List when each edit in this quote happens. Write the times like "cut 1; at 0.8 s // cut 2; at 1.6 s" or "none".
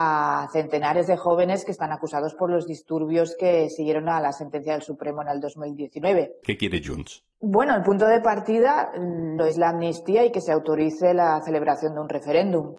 cut 1; at 6.4 s // cut 2; at 9.4 s